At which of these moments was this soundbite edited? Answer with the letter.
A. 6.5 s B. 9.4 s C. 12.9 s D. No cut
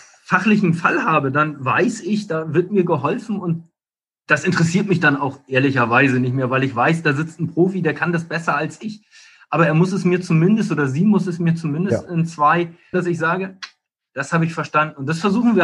C